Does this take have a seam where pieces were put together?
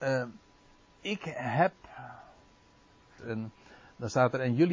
yes; 1 cut; at 3.2 s

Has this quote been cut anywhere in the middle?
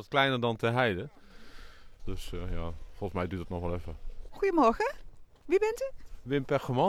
yes; 2 cuts; at 2.0 s, 4.3 s

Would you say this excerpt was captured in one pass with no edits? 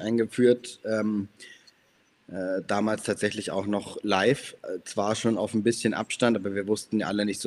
yes; 0 cuts

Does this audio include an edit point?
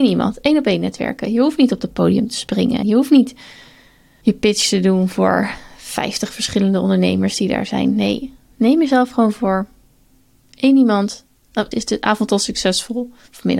yes; 2 cuts; at 2.8 s, 11.7 s

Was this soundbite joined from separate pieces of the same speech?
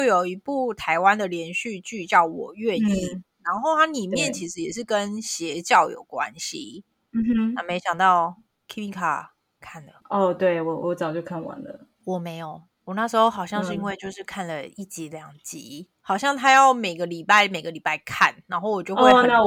yes; 1 cut; at 10.0 s

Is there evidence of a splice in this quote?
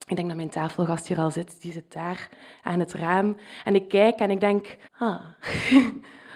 yes; 1 cut; at 4.8 s

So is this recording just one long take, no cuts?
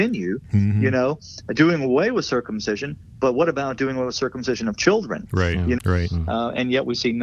no; 1 cut; at 5.8 s

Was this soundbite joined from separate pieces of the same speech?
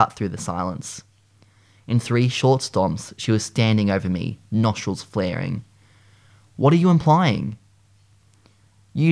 no; 0 cuts

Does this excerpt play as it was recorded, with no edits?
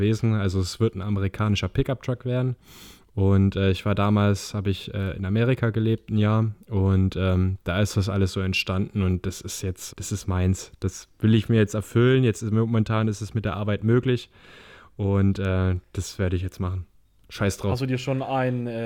no; 1 cut; at 9.9 s

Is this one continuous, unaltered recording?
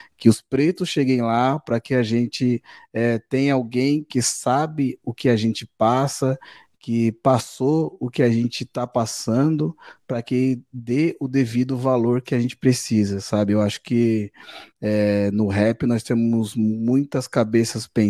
yes; 0 cuts

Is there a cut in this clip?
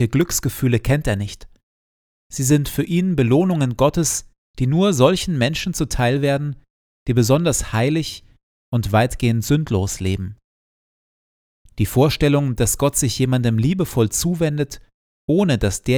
no; 0 cuts

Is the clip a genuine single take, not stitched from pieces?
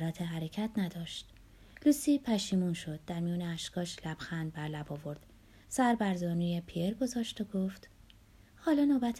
yes; 0 cuts

